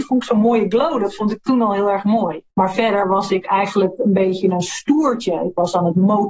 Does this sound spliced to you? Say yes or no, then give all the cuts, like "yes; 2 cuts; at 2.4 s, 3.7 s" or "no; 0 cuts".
yes; 1 cut; at 2.5 s